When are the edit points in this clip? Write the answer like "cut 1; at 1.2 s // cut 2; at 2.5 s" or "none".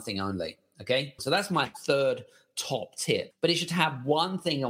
cut 1; at 1.2 s // cut 2; at 3.3 s

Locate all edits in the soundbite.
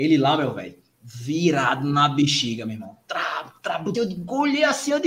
cut 1; at 3.9 s

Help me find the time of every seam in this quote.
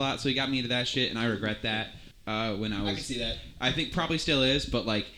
cut 1; at 2.1 s

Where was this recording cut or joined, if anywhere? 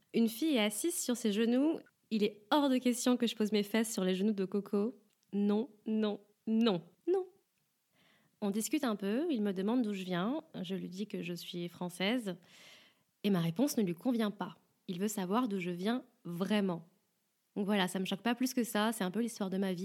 cut 1; at 6.9 s

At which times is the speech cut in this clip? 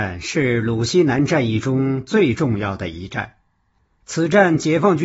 none

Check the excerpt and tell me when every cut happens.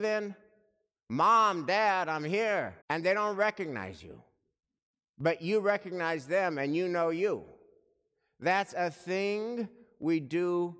cut 1; at 2.8 s

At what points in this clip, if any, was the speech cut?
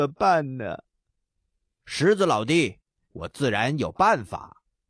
cut 1; at 1.8 s // cut 2; at 3.0 s

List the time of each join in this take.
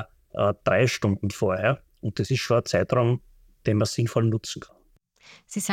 none

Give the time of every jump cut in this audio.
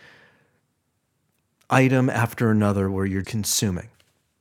cut 1; at 3.2 s

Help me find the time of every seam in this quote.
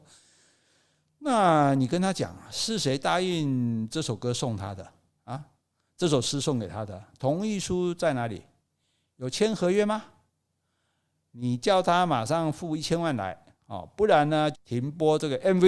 cut 1; at 14.5 s

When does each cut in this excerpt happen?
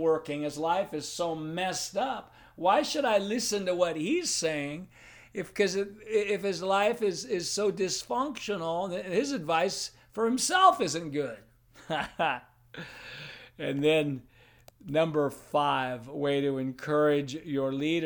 none

